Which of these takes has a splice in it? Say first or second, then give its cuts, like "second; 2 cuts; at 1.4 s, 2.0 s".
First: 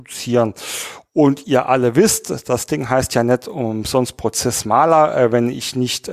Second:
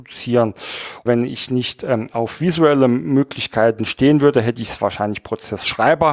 second; 1 cut; at 1.1 s